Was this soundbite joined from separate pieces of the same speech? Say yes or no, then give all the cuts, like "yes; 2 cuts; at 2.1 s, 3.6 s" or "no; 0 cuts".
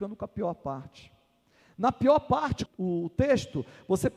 yes; 1 cut; at 2.7 s